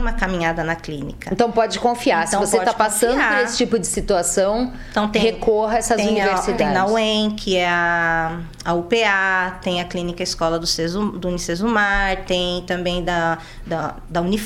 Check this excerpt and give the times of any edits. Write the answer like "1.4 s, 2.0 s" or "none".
none